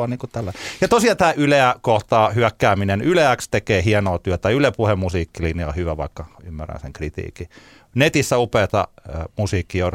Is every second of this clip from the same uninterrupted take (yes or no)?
yes